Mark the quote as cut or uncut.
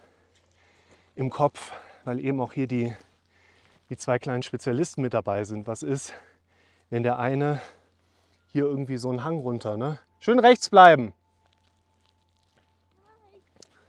uncut